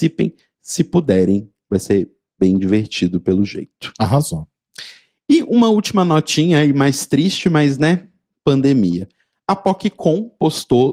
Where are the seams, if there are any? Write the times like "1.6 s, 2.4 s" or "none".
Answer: none